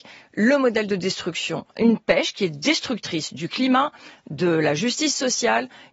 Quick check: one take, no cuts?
yes; 0 cuts

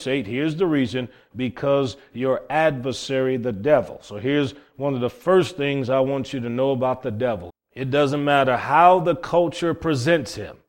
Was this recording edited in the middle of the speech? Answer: yes; 1 cut; at 7.5 s

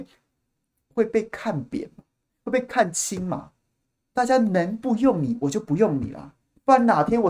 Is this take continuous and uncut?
yes; 0 cuts

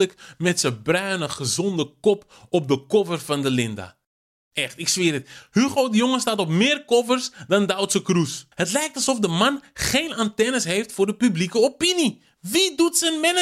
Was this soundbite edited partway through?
yes; 1 cut; at 8.5 s

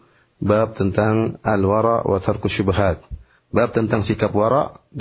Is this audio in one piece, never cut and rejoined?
yes; 0 cuts

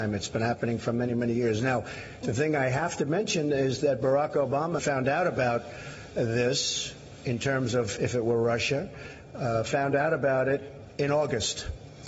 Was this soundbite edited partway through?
yes; 1 cut; at 4.8 s

